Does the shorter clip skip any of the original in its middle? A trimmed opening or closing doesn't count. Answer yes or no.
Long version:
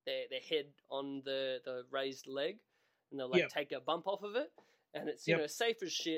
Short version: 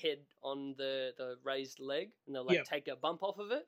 yes